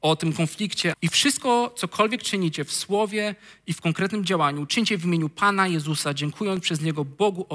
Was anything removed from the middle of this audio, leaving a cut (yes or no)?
yes